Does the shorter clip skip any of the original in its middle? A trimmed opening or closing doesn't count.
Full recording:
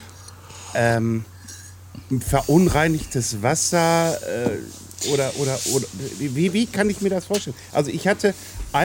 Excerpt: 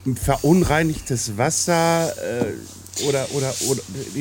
no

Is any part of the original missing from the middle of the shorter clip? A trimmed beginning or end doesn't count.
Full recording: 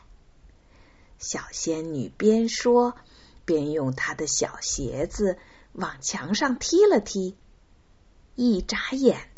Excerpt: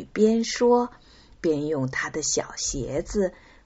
no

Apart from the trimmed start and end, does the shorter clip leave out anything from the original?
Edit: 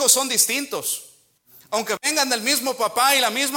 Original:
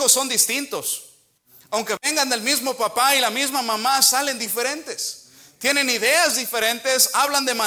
no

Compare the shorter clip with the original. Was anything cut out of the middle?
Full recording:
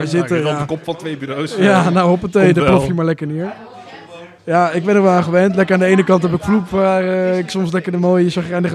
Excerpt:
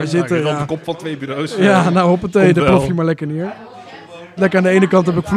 yes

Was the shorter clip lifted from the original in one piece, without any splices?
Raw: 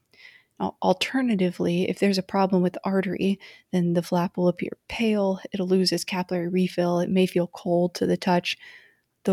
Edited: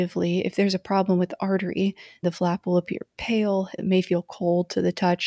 no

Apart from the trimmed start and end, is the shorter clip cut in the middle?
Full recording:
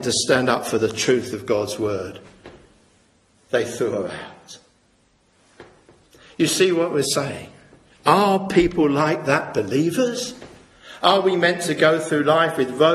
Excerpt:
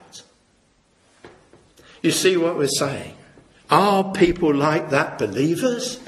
no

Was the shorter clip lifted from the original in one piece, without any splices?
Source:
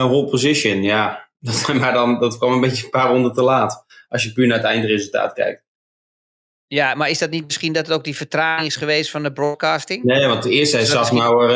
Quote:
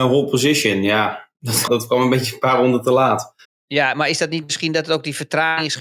no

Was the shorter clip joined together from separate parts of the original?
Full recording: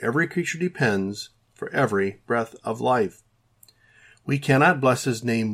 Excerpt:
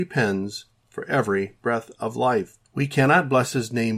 yes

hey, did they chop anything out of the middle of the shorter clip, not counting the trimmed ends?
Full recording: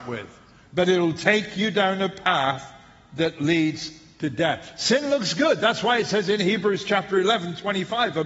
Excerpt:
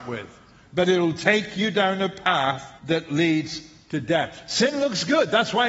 yes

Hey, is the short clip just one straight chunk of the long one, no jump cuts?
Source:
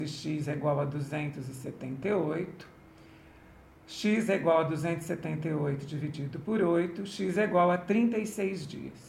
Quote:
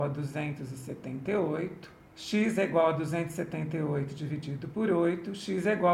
no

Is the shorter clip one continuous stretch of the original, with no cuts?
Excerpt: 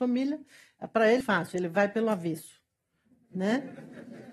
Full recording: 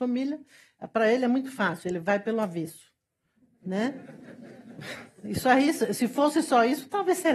no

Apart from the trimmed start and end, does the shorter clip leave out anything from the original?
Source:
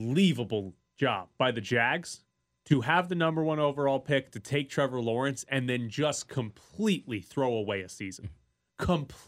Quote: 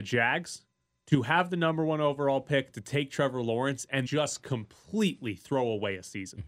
yes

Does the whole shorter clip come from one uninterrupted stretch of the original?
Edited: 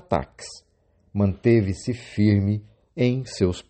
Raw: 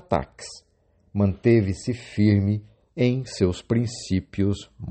yes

